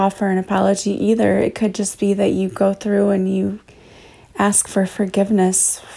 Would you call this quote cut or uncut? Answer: uncut